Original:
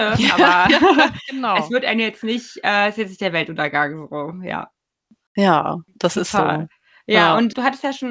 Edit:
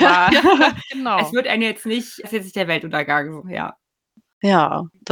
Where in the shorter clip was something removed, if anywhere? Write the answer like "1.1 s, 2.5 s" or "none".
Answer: 2.2 s, 3.4 s